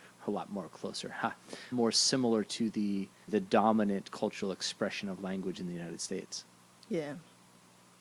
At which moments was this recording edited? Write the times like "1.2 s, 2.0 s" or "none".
1.7 s, 3.3 s